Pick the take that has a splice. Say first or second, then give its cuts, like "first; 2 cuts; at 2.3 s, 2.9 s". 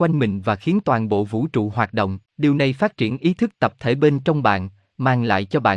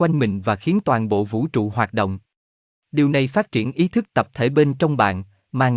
first; 1 cut; at 2.3 s